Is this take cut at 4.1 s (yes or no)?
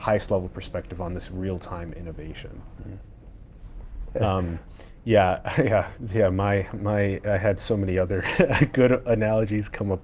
yes